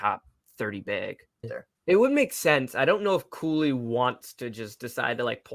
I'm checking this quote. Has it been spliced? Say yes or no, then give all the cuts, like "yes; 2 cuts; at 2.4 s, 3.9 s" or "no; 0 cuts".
yes; 1 cut; at 1.4 s